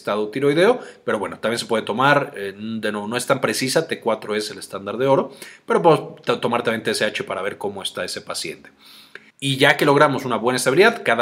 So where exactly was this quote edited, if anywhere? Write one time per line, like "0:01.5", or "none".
0:09.3